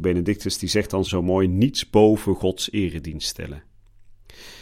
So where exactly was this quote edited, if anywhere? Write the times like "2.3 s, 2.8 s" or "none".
1.0 s